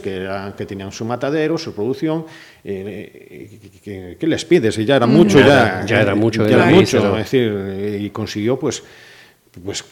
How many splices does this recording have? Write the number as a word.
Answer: zero